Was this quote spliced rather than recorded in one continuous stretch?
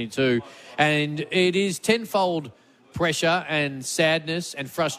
no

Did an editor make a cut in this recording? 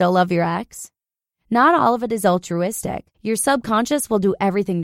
yes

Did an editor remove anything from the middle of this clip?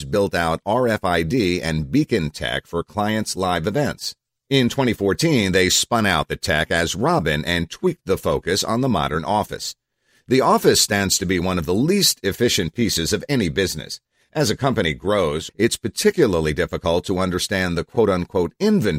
yes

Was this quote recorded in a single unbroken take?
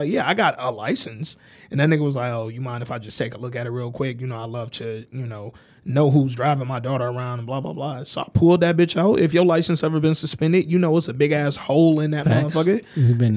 yes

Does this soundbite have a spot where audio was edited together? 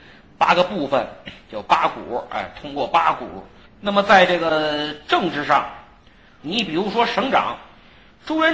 yes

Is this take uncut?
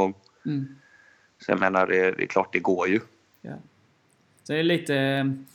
yes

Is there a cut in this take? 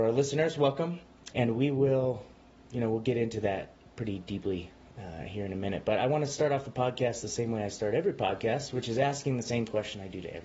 yes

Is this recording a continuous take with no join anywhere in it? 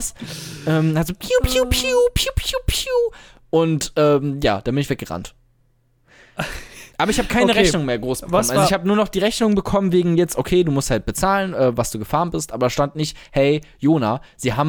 no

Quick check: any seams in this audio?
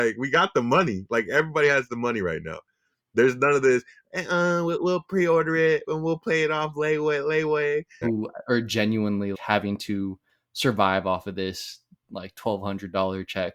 yes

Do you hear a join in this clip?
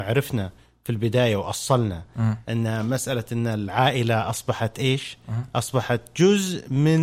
no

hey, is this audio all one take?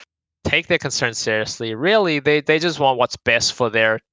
yes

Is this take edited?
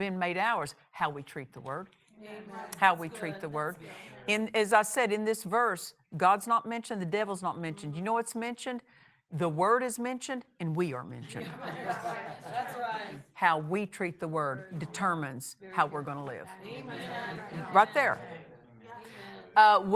no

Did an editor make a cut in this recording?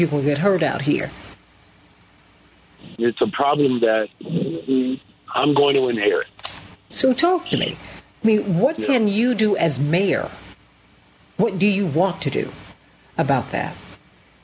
yes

